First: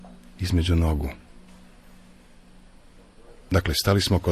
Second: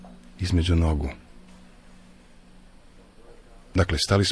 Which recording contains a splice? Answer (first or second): first